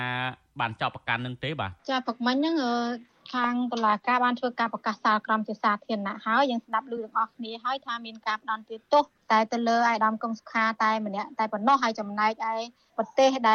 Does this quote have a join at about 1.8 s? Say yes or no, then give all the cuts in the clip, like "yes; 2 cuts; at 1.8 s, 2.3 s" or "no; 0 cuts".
yes; 1 cut; at 1.8 s